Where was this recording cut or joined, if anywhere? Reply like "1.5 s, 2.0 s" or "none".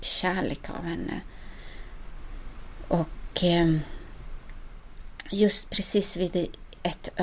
none